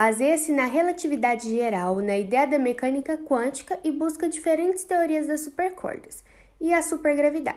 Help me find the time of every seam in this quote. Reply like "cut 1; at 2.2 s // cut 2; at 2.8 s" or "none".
none